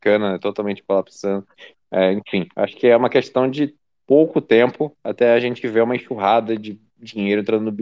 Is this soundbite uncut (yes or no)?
yes